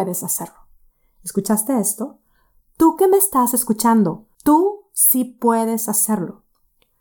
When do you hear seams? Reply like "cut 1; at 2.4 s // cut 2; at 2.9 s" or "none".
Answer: cut 1; at 4.3 s